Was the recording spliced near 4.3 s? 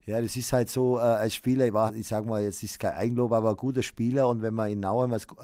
no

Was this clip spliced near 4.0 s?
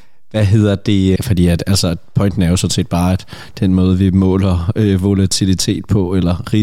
no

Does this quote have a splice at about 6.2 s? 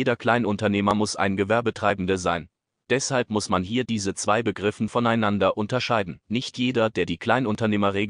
yes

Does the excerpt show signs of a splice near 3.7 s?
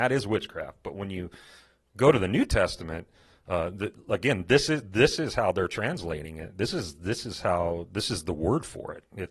no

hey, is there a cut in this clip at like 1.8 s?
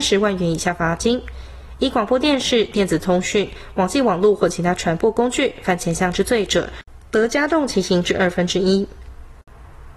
no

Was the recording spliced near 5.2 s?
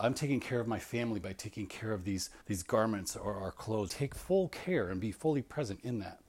no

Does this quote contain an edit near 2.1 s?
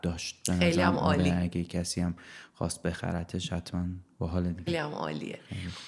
no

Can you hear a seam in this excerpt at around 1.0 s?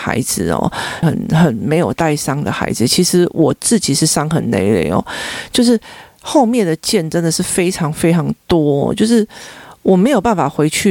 yes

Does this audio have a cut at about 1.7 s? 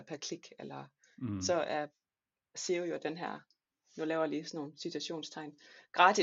no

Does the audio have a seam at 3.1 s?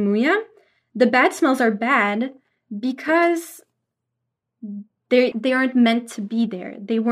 no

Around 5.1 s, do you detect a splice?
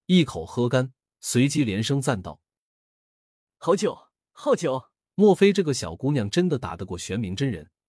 yes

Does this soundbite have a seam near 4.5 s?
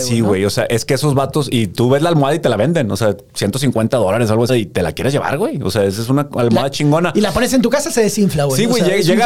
yes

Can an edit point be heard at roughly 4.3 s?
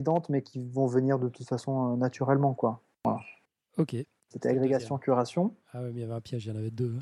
yes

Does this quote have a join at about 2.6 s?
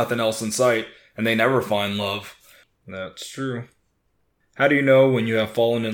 yes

